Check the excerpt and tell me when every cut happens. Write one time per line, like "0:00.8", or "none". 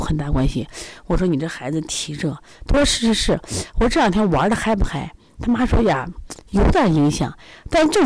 none